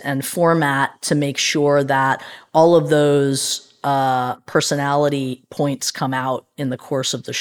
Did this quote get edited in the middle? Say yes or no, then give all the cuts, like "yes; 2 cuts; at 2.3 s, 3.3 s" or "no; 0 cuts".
no; 0 cuts